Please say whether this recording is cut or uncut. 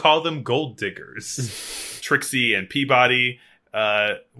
cut